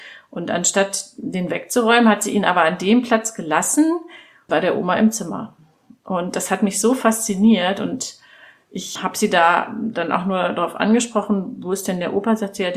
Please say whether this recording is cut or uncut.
cut